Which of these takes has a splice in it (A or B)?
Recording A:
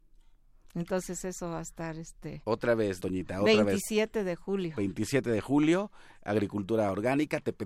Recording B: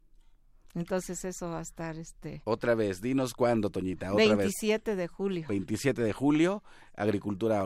A